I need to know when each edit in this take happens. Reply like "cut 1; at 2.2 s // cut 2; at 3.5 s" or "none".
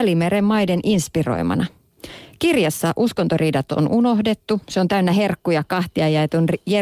none